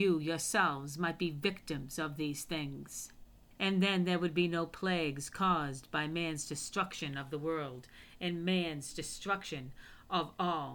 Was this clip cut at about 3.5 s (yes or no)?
yes